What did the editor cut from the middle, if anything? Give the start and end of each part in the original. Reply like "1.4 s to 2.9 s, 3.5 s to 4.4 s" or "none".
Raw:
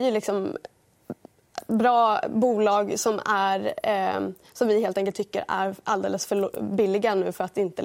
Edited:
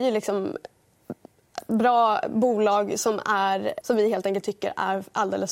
3.8 s to 4.5 s

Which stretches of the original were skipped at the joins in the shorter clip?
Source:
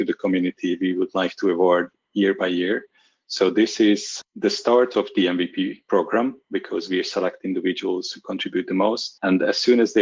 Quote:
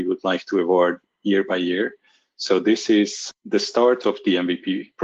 none

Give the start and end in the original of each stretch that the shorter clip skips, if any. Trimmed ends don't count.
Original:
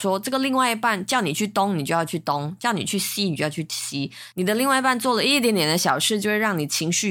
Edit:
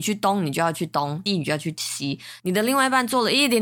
2.6 s to 3.2 s

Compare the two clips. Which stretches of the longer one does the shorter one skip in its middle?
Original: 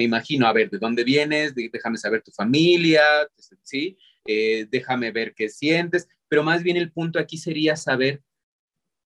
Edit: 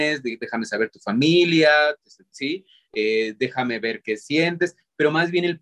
none

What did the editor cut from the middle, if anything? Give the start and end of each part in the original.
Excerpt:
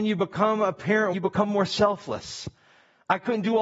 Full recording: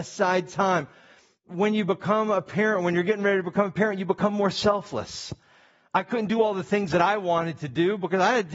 2.8 s to 4.0 s

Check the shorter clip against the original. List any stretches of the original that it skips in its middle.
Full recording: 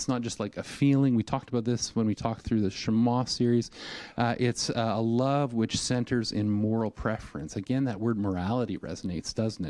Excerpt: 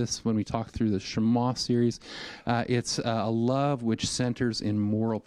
none

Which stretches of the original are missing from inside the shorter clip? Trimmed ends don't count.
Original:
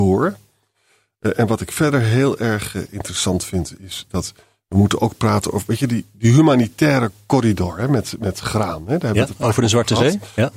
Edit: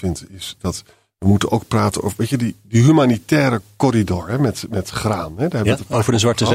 none

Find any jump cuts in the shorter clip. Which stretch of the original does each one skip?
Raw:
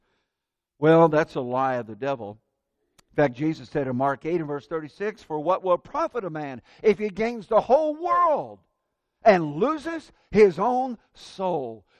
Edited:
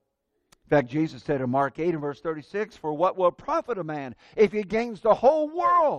none

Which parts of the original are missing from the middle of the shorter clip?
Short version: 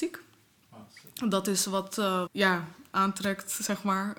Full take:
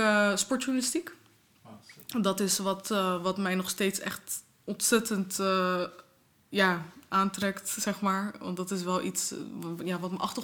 3.2 s to 6.4 s

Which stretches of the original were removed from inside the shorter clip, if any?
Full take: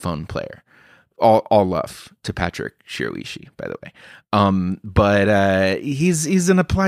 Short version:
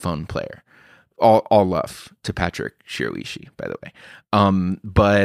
none

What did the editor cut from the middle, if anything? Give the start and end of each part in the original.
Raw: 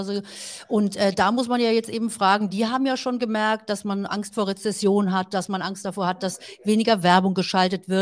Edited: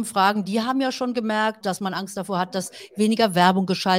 3.7 s to 5.3 s

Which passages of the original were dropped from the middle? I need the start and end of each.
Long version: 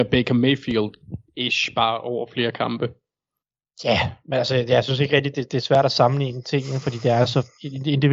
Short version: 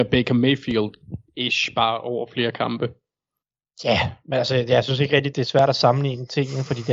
5.3 s to 5.5 s

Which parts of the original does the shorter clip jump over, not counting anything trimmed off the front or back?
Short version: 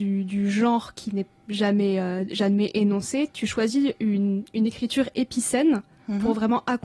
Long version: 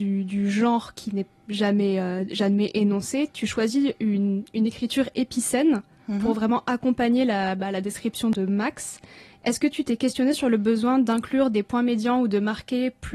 none

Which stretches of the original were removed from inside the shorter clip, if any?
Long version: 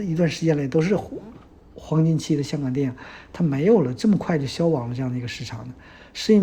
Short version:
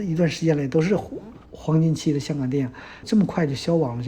1.5 s to 1.7 s, 3.3 s to 3.9 s

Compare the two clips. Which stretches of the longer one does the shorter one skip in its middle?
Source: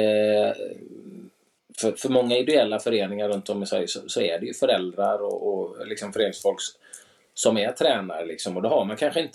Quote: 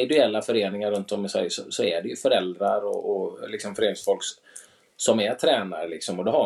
none

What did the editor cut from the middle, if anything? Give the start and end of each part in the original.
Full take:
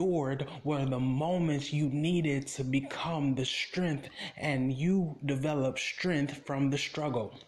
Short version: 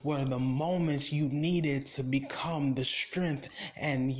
none

